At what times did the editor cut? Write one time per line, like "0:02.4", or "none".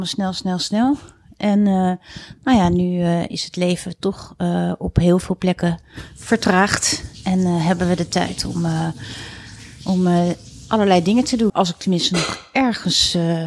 0:11.5